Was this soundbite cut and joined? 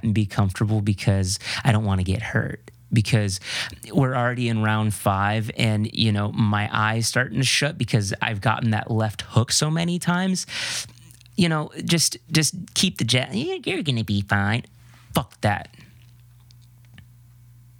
no; 0 cuts

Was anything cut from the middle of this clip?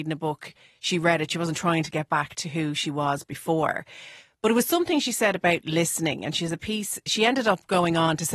no; 0 cuts

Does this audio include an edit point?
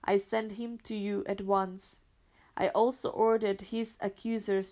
no; 0 cuts

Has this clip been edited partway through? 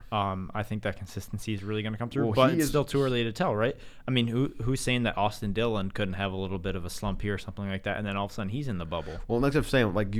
no; 0 cuts

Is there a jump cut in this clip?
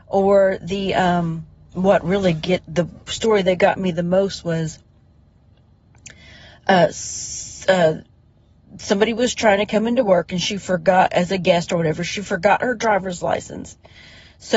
no; 0 cuts

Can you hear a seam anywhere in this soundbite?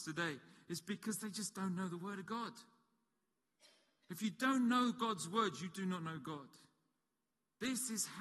no; 0 cuts

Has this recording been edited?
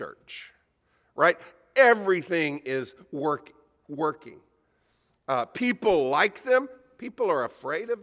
no; 0 cuts

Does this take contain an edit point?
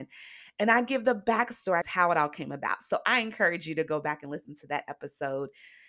yes; 1 cut; at 1.8 s

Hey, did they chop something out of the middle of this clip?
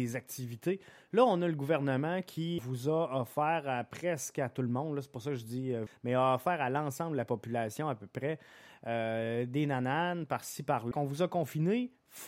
yes; 3 cuts; at 2.6 s, 5.9 s, 10.9 s

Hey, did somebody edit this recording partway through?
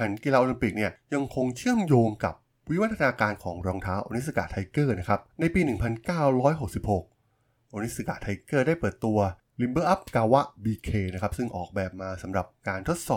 yes; 1 cut; at 5.3 s

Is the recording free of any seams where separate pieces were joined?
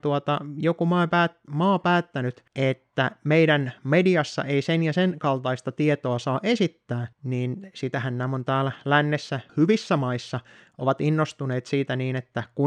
no; 3 cuts; at 2.5 s, 7.1 s, 9.5 s

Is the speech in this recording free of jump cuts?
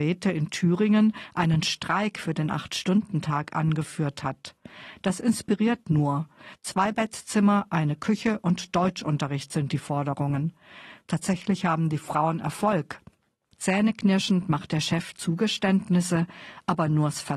no; 2 cuts; at 6.6 s, 13.5 s

